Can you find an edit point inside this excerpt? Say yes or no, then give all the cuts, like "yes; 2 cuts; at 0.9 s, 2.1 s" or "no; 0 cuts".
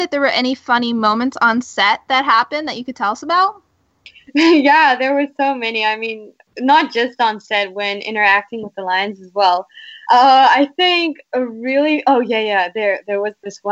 no; 0 cuts